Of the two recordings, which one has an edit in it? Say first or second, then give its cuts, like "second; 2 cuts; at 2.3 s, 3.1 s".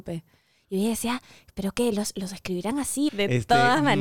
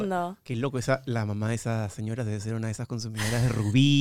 first; 1 cut; at 3.1 s